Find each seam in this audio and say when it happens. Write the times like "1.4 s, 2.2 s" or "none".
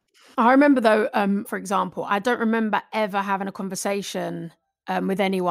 1.5 s